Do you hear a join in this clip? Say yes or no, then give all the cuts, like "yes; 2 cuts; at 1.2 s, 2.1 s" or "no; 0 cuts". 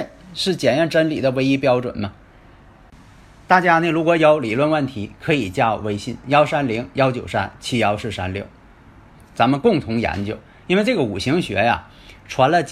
no; 0 cuts